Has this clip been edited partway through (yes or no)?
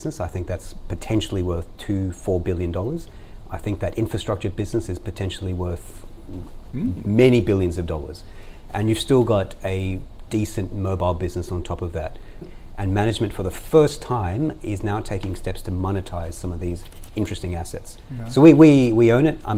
yes